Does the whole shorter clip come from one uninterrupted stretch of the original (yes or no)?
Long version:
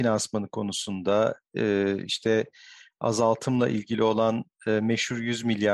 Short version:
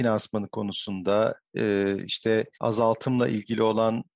no